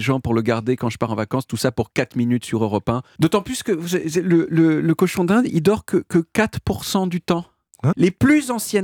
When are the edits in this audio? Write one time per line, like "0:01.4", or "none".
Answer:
0:03.2
0:07.9

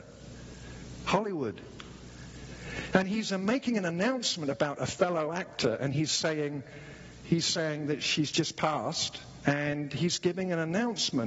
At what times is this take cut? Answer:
none

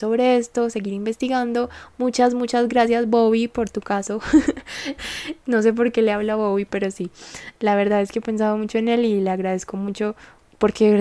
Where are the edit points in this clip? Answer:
0:05.0

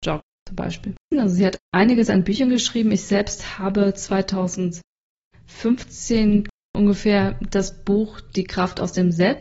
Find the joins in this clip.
0:01.1

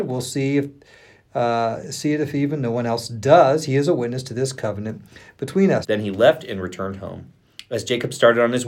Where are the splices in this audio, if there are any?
0:05.8

